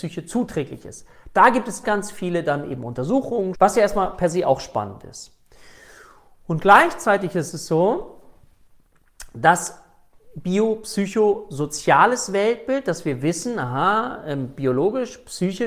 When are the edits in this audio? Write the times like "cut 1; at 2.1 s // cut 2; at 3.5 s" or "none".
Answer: cut 1; at 1.8 s // cut 2; at 3.5 s